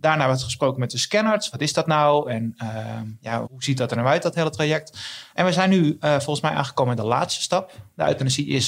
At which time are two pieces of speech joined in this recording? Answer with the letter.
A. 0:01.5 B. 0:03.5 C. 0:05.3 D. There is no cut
B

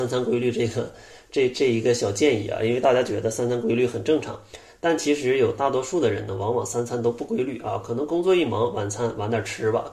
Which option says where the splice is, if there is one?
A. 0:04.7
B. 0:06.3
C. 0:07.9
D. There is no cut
D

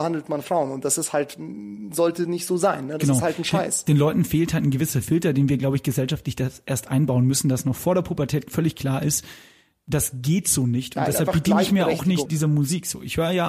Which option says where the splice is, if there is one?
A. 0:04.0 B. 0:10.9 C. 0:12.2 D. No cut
C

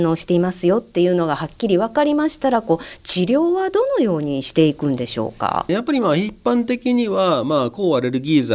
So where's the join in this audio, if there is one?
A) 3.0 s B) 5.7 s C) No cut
B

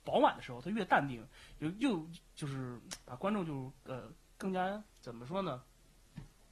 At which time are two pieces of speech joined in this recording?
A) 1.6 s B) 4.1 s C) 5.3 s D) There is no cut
D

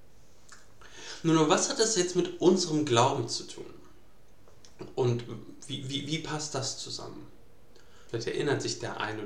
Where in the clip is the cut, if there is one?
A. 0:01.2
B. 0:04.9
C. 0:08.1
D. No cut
C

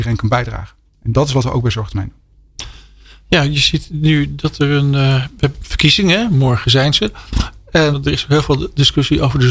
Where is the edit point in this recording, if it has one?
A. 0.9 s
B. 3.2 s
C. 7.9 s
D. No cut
C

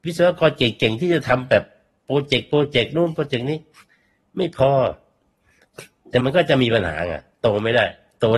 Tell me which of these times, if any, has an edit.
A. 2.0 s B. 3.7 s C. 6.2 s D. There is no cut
C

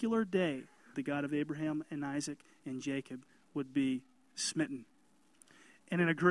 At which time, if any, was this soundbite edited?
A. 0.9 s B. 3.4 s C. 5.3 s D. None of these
A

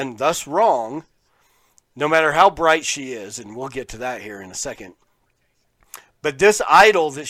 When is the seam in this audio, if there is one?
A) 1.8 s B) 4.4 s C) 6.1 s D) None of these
D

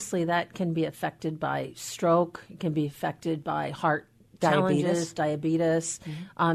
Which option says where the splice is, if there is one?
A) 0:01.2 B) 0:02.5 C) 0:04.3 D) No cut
D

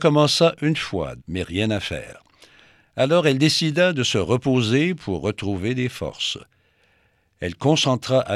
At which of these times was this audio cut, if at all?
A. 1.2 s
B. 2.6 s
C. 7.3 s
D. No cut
A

